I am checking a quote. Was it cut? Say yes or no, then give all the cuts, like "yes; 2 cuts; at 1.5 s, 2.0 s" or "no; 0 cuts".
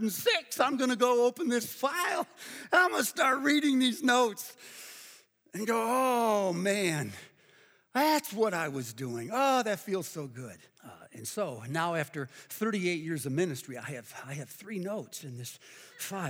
yes; 1 cut; at 10.8 s